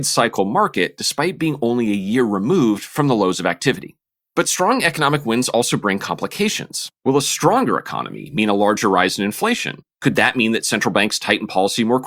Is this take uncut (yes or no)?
yes